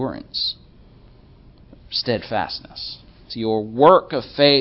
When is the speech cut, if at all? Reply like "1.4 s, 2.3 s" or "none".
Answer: 3.3 s